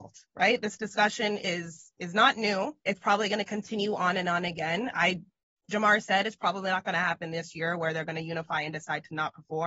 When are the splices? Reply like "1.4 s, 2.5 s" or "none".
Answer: 2.8 s, 5.6 s